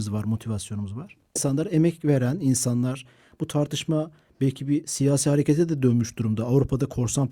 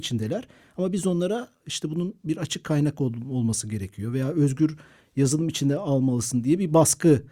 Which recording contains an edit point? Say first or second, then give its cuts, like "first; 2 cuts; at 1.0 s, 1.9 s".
first; 1 cut; at 1.4 s